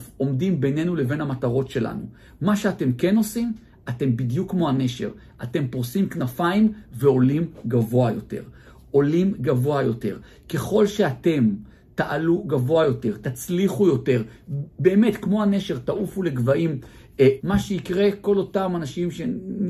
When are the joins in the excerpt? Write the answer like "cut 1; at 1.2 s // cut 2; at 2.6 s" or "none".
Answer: cut 1; at 13.2 s // cut 2; at 17.4 s